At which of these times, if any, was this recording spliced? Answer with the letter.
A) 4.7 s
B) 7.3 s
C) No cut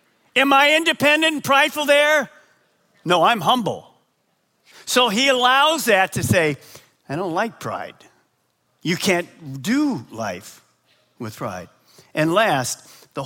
A